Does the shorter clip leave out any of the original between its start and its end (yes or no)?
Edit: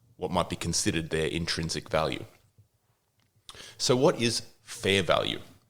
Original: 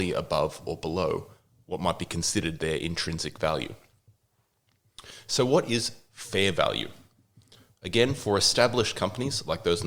no